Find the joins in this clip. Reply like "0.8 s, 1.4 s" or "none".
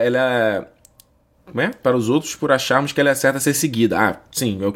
none